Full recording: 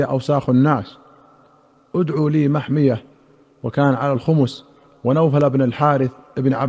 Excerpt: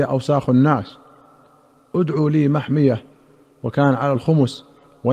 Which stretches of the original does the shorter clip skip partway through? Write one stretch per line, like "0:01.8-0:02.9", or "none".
none

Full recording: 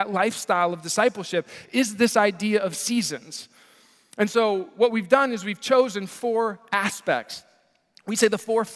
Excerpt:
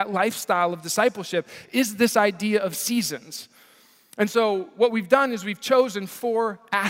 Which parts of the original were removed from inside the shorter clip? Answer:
none

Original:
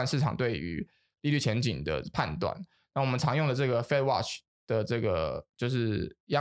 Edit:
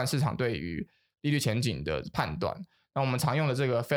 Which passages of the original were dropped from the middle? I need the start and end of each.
none

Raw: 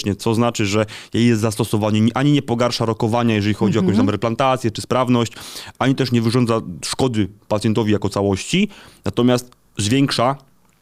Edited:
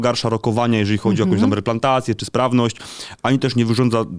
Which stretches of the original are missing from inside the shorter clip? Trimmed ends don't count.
none

